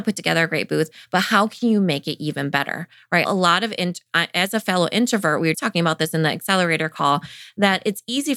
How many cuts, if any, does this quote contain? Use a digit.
2